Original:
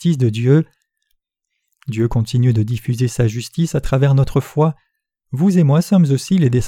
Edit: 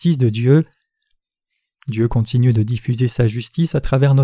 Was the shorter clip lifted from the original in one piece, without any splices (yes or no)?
yes